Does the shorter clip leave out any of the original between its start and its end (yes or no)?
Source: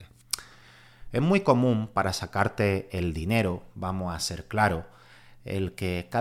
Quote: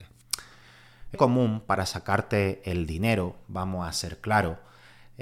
yes